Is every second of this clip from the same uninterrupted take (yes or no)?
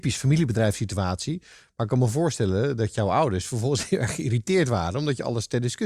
yes